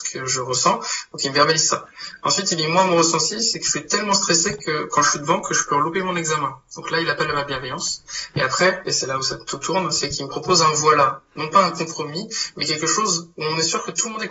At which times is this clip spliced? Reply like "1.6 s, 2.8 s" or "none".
none